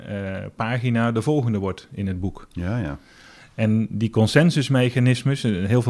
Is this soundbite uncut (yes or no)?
yes